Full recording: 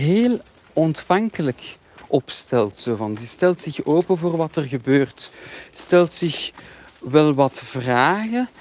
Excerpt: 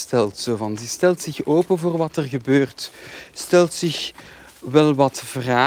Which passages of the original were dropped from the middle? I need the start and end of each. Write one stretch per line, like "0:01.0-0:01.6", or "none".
none